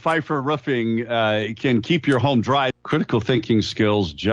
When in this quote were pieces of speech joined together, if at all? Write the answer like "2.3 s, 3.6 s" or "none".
2.7 s